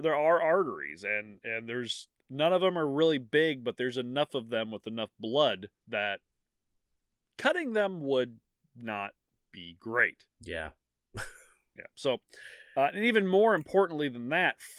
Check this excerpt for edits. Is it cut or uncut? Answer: uncut